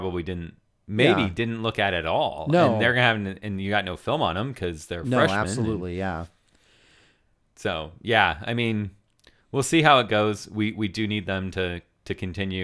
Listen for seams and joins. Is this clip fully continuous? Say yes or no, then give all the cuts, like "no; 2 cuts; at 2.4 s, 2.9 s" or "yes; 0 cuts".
yes; 0 cuts